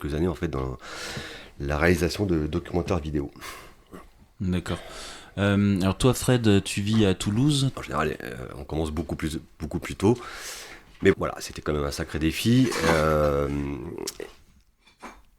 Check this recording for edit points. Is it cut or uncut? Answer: cut